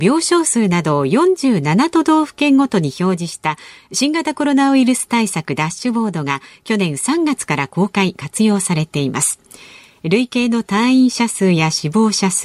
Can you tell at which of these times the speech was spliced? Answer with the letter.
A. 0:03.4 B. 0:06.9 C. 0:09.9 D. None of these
D